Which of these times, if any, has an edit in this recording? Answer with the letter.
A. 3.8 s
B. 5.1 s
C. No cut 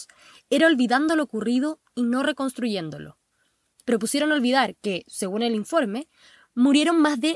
C